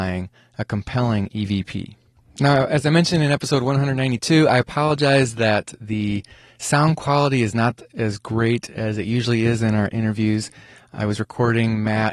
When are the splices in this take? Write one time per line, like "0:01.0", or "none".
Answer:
none